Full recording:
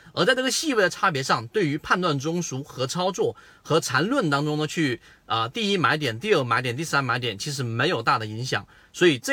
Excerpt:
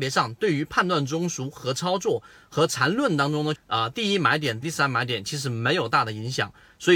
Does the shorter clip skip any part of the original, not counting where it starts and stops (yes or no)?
yes